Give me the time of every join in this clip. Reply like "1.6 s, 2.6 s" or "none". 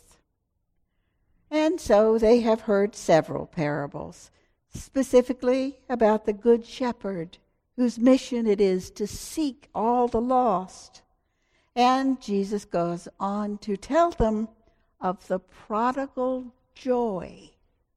none